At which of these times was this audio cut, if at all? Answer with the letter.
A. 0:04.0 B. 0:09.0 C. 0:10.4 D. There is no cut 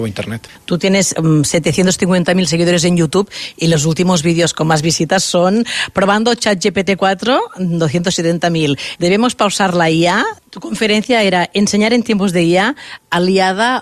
B